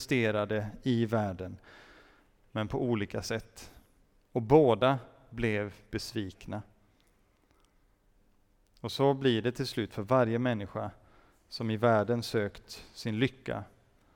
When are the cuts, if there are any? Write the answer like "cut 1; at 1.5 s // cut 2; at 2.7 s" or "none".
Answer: none

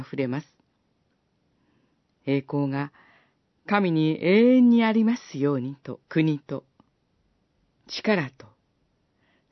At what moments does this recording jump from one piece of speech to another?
cut 1; at 6.0 s

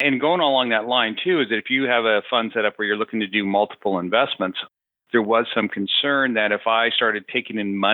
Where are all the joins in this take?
none

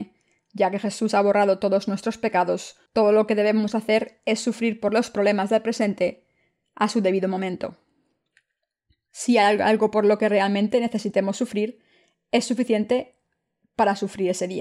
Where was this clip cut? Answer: cut 1; at 2.9 s

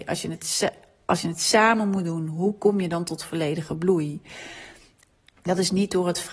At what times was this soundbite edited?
cut 1; at 5.3 s

